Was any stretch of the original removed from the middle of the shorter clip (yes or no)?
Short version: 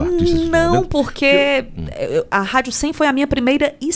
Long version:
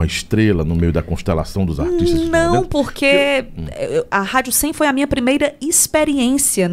no